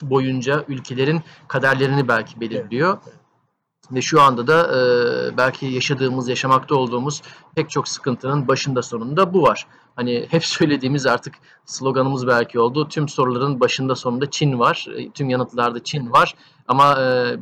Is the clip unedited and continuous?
yes; 0 cuts

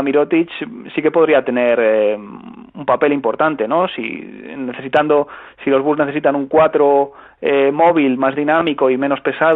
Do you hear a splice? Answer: no; 0 cuts

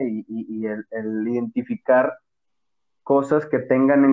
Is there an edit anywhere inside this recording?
no; 0 cuts

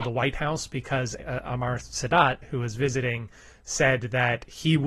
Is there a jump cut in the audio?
yes; 1 cut; at 1.2 s

